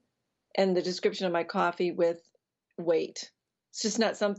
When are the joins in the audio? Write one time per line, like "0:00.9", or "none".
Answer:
none